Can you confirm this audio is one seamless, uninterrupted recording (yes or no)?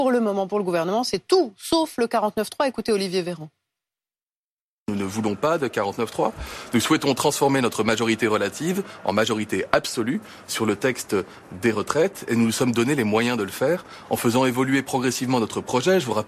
yes